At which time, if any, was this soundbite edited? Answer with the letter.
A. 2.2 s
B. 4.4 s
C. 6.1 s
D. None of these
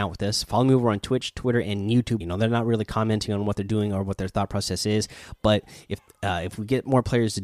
A